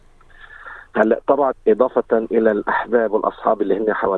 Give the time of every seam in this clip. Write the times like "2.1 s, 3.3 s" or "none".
1.5 s